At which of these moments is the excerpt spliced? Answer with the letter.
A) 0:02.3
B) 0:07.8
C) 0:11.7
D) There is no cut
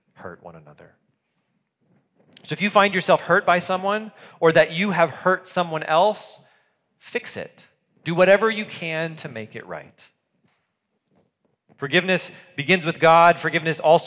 D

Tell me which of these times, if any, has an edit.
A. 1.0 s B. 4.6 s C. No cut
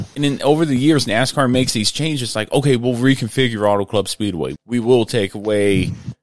B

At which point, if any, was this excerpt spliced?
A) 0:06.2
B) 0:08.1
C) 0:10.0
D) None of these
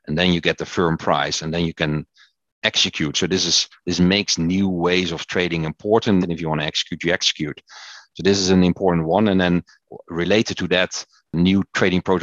A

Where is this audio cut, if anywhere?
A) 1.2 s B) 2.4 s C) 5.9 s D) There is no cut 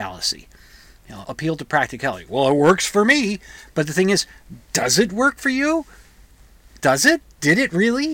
A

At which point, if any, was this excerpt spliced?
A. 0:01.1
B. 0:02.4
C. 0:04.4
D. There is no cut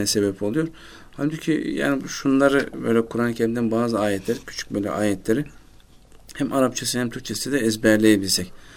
C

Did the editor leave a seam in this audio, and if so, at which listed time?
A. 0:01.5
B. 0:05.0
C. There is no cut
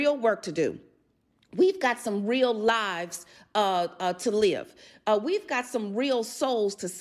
C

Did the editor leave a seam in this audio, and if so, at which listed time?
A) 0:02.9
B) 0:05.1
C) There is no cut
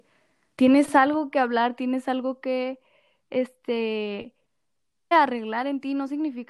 B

